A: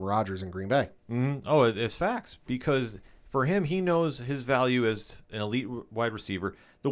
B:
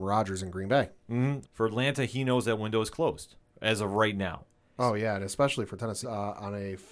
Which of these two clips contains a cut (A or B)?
B